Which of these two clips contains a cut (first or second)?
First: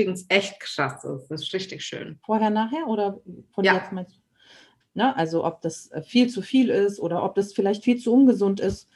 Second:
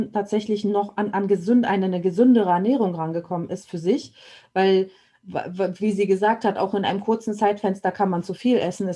first